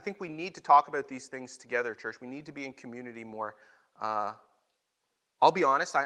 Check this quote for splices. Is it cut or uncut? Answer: uncut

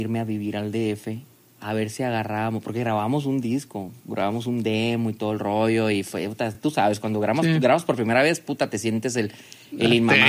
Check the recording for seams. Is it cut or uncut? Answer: uncut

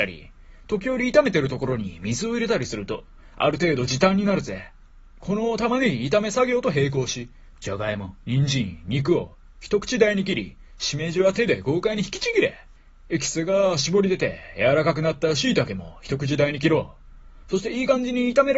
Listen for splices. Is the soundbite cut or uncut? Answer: uncut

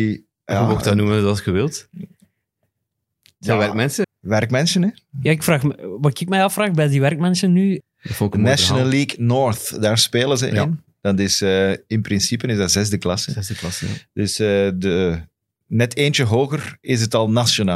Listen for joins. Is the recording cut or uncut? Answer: cut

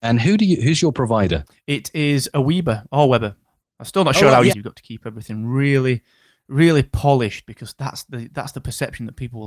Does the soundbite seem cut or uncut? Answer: cut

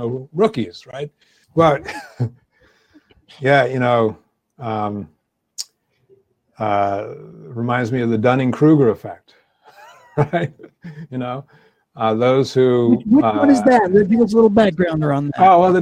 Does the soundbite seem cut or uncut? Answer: cut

